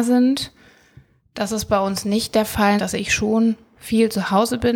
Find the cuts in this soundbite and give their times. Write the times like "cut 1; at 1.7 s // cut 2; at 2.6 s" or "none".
cut 1; at 2.8 s